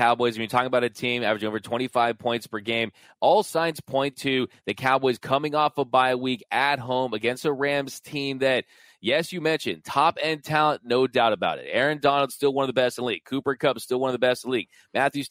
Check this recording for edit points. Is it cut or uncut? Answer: uncut